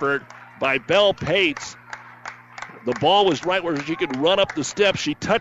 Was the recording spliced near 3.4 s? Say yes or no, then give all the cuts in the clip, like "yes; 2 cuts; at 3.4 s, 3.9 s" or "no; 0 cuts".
yes; 1 cut; at 3.4 s